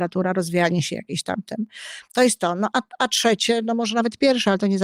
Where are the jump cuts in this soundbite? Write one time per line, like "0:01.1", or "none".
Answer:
none